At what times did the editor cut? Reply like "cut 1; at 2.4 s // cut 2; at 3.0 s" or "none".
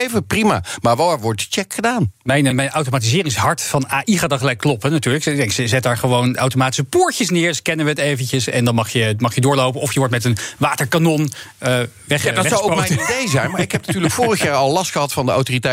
cut 1; at 2.5 s